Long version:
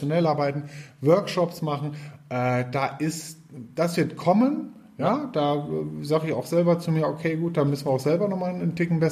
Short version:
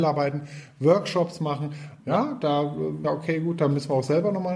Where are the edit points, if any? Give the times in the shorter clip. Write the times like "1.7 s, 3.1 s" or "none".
2.0 s, 3.0 s